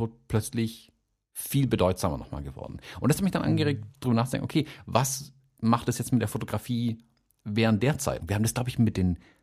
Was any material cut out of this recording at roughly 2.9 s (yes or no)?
no